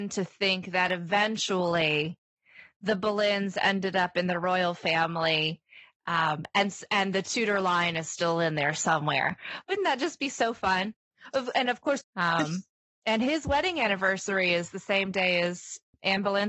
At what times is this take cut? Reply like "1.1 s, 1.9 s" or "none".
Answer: 12.0 s